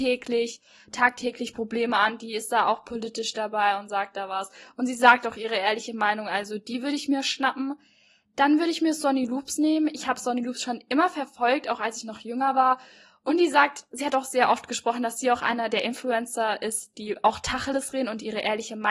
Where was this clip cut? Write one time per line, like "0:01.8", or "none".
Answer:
none